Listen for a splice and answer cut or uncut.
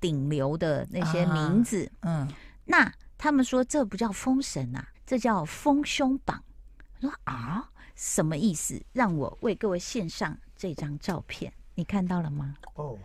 cut